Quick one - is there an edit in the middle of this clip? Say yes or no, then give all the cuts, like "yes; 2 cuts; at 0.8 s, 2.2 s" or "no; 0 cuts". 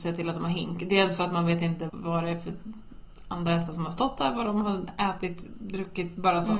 yes; 1 cut; at 1.9 s